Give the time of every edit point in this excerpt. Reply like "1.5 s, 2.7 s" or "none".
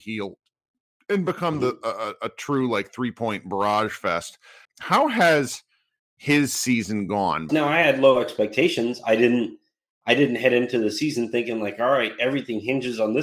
4.6 s, 7.5 s

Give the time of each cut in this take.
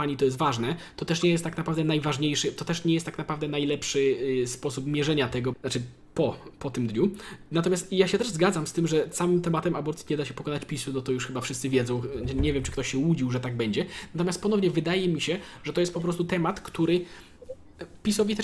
5.5 s

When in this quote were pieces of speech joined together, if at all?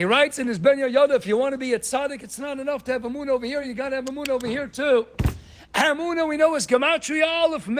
none

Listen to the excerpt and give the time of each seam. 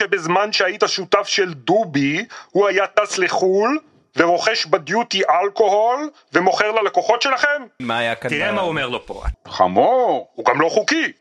7.8 s, 9.3 s

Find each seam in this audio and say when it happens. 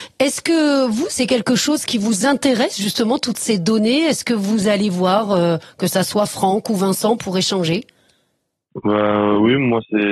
none

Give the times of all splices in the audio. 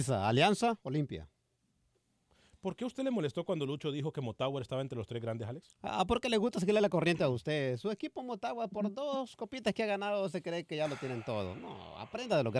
none

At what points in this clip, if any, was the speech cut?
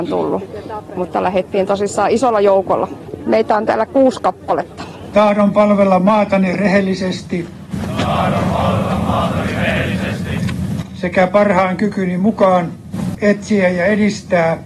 13.1 s

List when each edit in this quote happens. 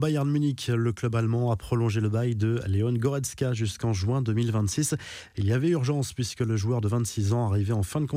none

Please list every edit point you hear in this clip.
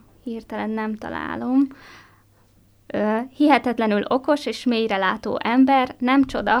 none

